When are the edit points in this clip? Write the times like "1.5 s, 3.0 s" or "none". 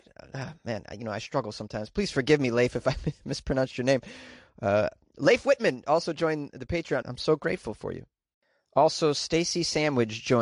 7.0 s